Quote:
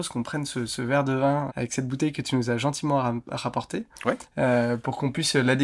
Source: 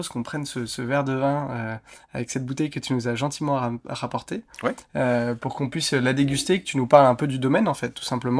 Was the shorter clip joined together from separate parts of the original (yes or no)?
yes